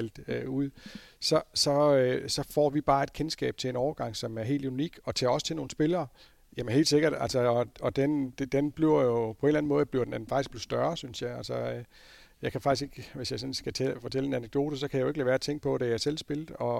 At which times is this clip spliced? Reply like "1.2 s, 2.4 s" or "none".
6.4 s